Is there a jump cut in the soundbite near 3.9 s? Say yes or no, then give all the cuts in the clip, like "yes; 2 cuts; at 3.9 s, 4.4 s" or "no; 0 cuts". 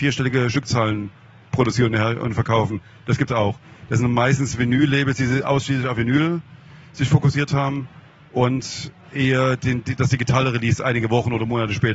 no; 0 cuts